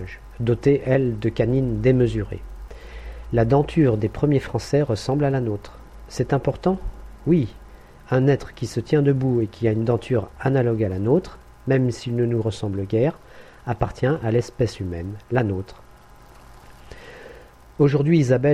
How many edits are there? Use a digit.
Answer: 0